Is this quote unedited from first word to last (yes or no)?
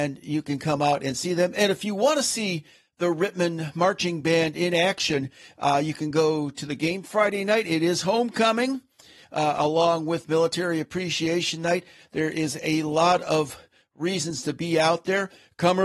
yes